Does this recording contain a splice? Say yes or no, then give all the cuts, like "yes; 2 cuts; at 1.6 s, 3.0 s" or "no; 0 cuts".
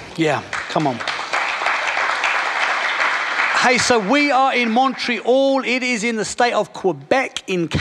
no; 0 cuts